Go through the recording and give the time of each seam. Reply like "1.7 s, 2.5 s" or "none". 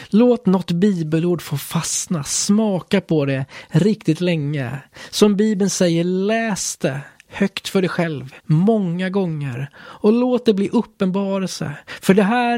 8.4 s

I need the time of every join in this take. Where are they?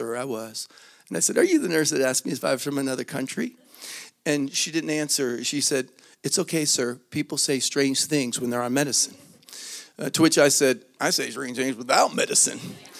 none

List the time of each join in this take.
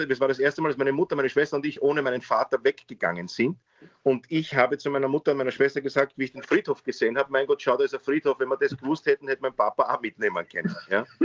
none

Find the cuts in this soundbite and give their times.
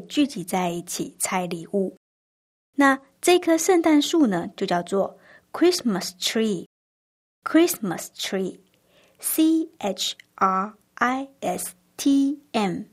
none

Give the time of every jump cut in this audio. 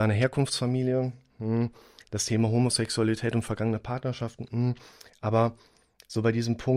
none

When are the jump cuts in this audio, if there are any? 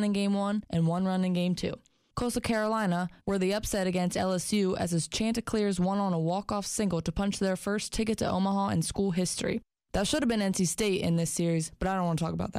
3.2 s

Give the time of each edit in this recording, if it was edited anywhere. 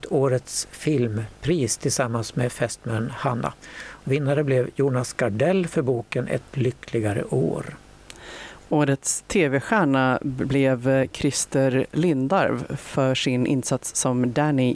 4.0 s

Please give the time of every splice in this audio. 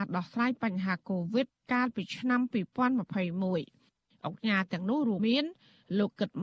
5.2 s

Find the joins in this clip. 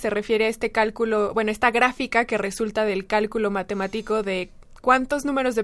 none

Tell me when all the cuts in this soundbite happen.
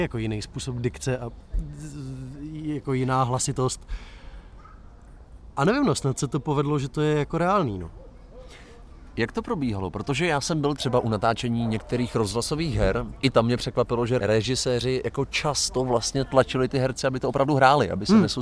none

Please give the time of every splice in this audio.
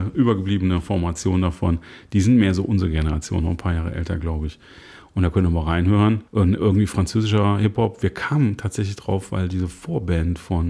6.3 s

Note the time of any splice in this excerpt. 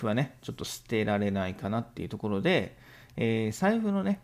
none

